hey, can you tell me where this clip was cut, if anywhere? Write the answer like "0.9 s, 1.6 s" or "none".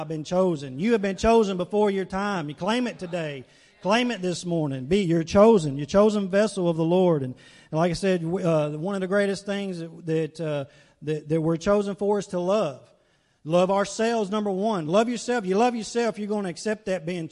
none